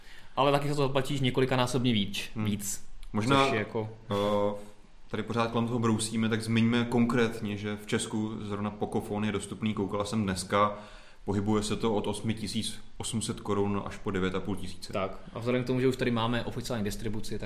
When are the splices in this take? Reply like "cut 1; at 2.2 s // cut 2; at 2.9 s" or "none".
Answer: none

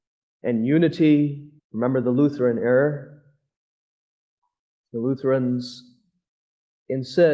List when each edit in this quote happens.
cut 1; at 1.6 s

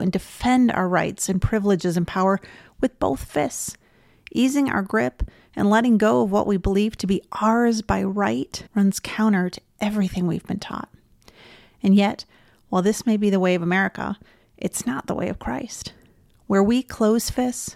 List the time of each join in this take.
cut 1; at 8.7 s

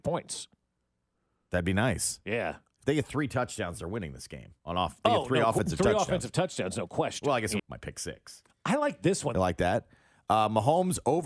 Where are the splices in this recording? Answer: cut 1; at 4.6 s // cut 2; at 7.6 s // cut 3; at 9.3 s

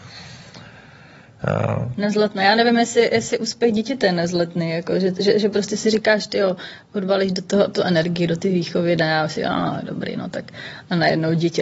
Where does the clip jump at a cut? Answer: none

